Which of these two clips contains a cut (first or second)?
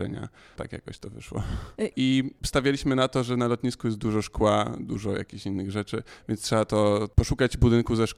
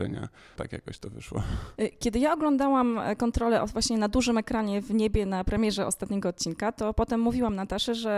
first